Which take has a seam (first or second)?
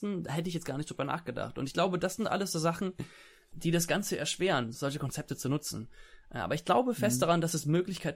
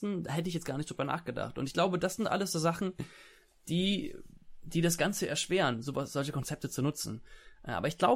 first